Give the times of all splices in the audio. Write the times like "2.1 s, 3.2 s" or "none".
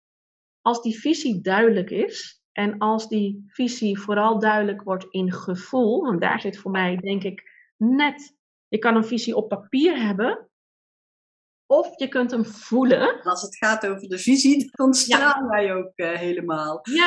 13.3 s, 14.7 s